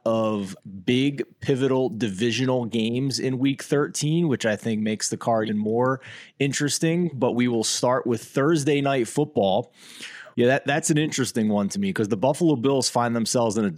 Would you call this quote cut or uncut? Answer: cut